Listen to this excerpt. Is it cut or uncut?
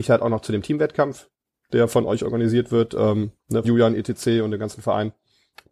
cut